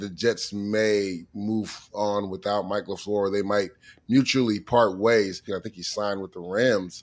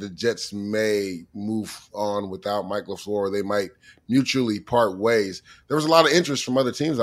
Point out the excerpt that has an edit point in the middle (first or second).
first